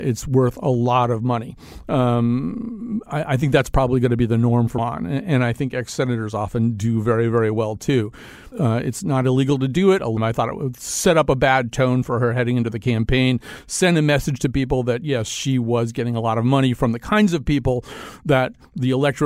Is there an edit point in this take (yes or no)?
yes